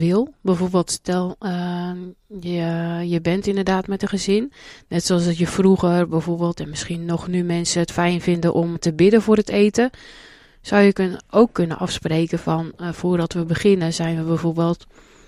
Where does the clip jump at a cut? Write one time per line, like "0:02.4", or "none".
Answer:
0:08.8